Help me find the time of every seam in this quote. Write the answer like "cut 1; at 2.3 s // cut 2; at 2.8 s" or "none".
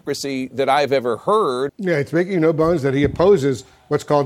cut 1; at 1.7 s

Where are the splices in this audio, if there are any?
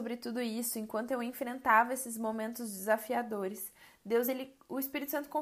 none

